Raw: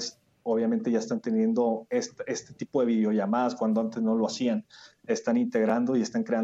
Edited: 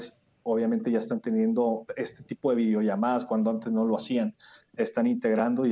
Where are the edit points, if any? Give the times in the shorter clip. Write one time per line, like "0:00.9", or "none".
0:01.9